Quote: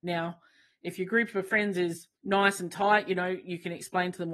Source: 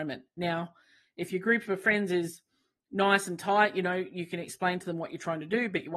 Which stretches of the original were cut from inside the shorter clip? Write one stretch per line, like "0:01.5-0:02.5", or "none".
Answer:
0:02.5-0:02.8

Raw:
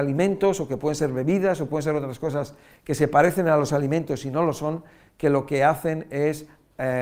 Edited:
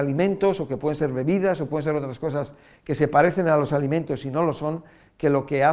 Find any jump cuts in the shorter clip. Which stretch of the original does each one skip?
none

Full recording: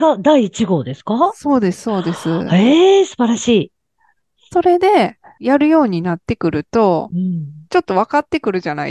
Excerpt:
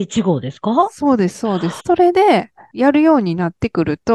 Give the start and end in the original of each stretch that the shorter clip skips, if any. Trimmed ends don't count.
0:02.2-0:04.5

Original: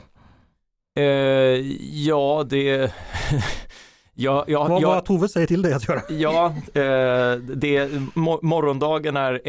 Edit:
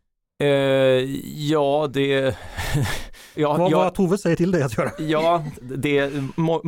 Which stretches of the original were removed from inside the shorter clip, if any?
0:03.9-0:04.4
0:06.7-0:07.4

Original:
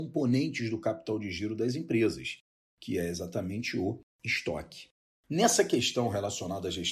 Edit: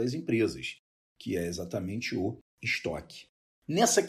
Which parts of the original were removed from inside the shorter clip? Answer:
none

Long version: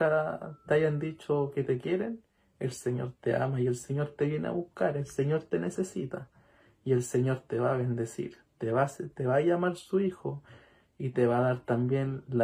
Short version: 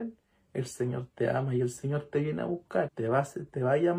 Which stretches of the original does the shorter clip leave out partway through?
0:04.9-0:08.5

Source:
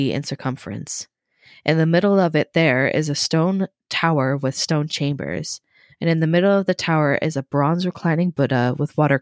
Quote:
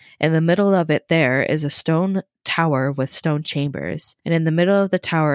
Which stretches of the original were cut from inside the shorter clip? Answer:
0:05.6-0:05.9

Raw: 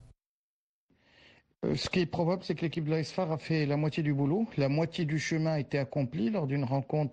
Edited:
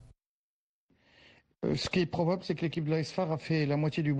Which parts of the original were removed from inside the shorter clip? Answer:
none

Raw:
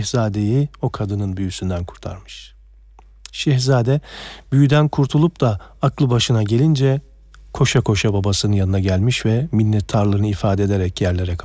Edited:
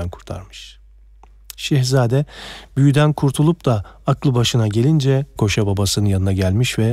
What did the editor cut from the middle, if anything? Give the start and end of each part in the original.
0:07.1-0:07.8

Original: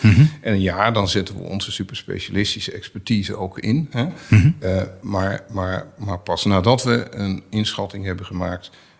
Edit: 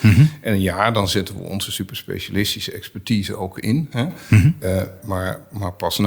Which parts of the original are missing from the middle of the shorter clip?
0:05.0-0:05.4

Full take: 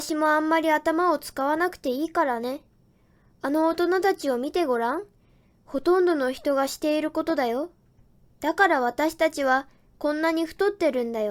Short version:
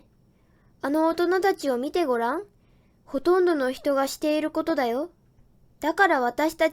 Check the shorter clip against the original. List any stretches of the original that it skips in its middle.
none

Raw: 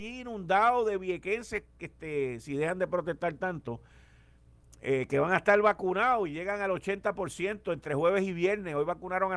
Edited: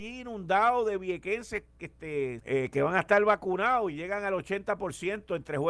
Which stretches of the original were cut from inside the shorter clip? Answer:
0:02.4-0:04.8

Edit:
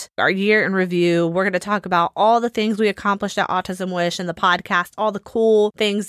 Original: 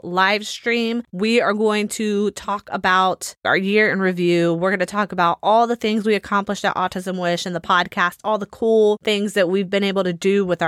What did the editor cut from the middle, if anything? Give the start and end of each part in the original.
none

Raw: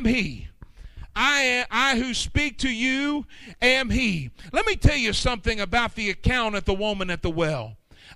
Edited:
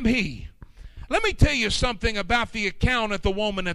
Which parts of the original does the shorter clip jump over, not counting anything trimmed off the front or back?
0:01.1-0:04.5

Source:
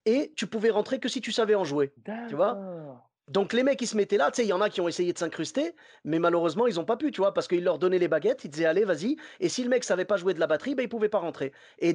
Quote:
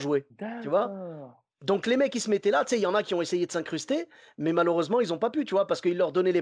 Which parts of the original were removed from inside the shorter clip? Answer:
none

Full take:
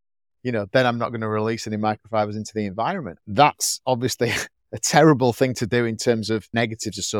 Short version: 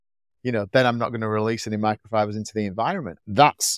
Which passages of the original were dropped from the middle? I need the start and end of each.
none

